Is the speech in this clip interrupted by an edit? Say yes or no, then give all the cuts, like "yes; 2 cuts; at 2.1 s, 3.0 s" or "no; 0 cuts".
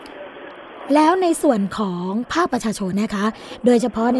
yes; 1 cut; at 2.9 s